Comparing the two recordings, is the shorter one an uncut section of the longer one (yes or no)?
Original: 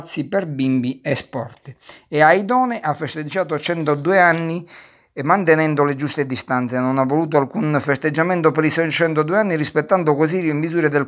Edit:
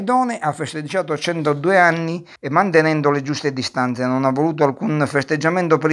no